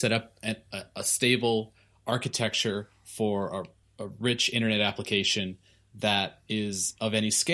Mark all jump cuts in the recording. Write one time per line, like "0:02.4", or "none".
0:03.8